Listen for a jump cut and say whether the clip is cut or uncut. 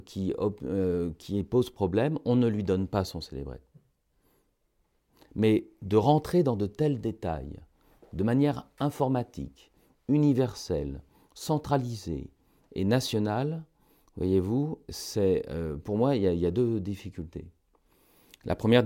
uncut